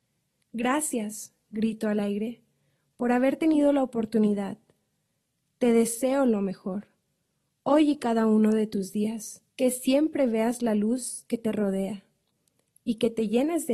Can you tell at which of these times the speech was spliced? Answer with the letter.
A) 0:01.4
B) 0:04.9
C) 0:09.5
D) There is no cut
C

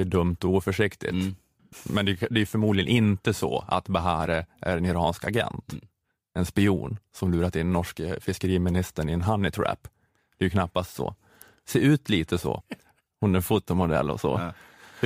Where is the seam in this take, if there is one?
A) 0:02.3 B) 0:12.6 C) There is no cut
B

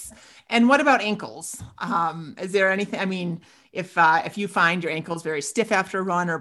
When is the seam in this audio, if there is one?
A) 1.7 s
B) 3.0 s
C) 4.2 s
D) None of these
D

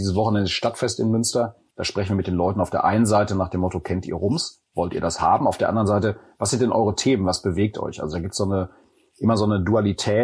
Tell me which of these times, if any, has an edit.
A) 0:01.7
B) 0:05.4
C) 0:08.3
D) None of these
A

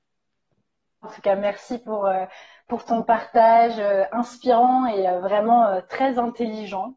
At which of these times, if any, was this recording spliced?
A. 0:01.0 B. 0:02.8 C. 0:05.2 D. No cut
A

